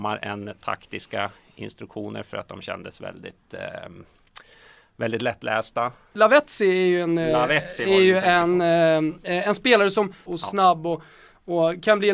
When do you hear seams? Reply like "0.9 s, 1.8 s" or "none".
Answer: 6.1 s, 10.3 s